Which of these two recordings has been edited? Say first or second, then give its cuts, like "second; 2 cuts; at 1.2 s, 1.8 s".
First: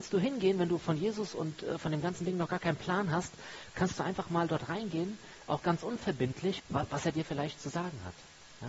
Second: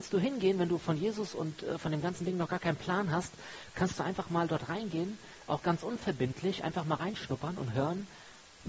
first; 1 cut; at 6.6 s